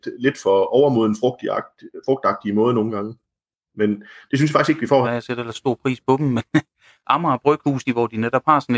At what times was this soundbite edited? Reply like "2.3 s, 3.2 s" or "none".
5.0 s, 7.8 s